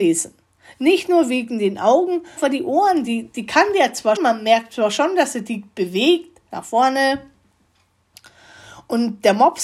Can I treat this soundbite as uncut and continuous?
no; 3 cuts; at 2.4 s, 4.2 s, 6.5 s

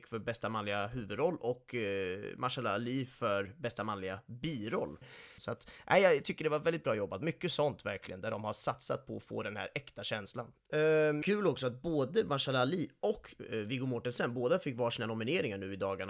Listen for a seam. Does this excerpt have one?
yes; 1 cut; at 5.4 s

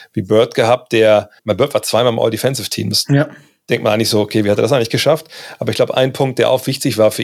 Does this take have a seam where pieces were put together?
yes; 1 cut; at 1.4 s

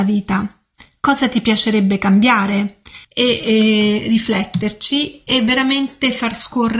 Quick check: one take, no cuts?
no; 1 cut; at 3.0 s

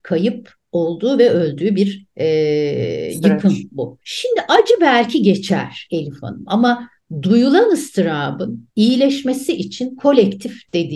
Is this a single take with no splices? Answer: no; 2 cuts; at 4.0 s, 8.7 s

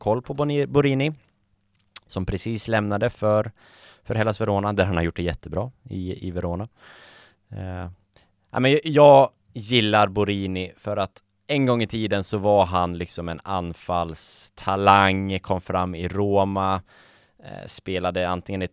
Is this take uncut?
yes; 0 cuts

